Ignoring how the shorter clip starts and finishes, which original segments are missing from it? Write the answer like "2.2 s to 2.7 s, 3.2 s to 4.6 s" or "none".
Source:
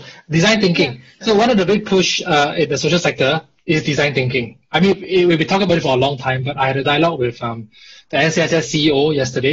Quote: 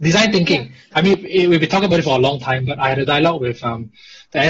1.2 s to 4.7 s

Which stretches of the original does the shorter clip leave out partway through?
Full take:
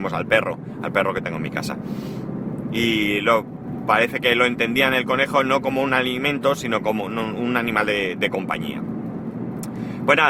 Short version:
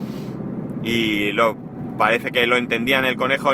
none

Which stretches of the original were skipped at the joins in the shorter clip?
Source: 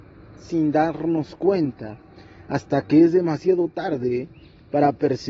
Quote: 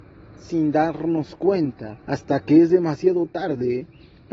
2.0 s to 2.5 s

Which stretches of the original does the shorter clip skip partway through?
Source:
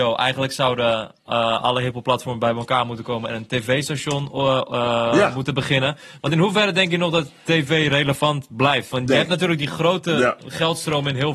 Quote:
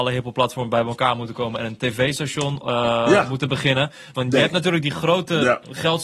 4.3 s to 4.7 s, 6.2 s to 8.9 s

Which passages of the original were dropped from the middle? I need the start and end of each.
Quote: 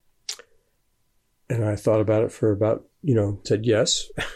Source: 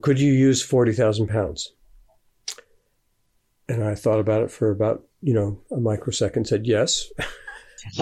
5.6 s to 6.5 s

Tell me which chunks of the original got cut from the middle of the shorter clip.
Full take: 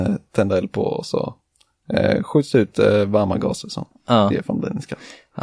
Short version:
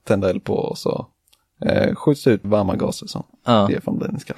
2.7 s to 3.1 s

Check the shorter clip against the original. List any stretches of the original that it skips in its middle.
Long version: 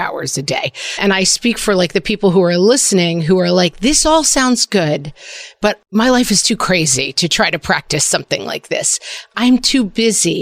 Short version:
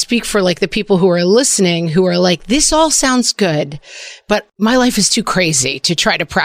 none

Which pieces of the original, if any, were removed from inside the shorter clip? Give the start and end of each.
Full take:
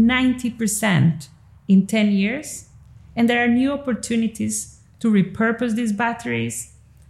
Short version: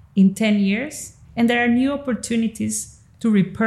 2.8 s to 3.0 s

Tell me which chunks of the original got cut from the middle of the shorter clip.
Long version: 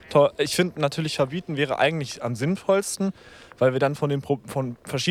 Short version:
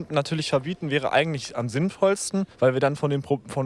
3.2 s to 3.5 s

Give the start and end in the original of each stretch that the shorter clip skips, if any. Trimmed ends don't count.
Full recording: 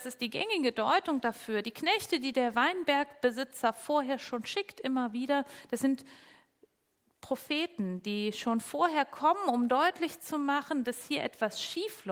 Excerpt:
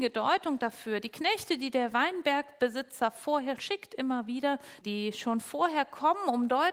4.2 s to 4.4 s, 5.7 s to 8.0 s

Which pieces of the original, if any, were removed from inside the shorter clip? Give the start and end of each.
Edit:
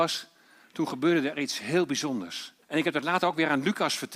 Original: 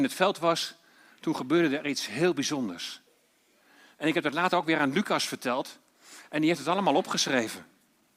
3.1 s to 3.9 s

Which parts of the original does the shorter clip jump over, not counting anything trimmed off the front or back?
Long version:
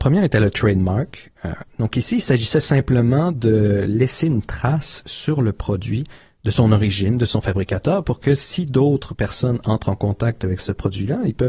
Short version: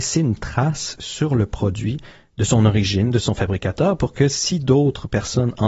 none

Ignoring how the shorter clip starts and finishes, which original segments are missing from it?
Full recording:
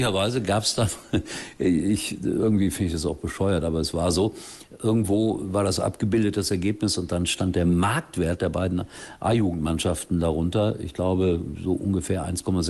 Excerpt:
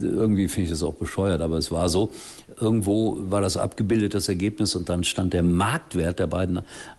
none

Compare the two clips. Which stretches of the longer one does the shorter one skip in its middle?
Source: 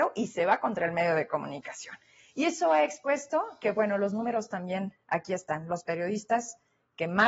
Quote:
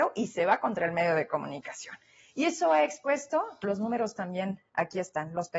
3.6 s to 4.0 s

